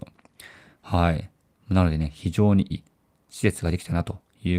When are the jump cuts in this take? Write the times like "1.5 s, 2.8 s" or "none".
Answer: 2.7 s